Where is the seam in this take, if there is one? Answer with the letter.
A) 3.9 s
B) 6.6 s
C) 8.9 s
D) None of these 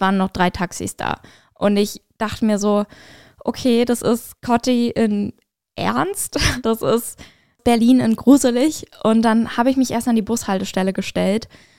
B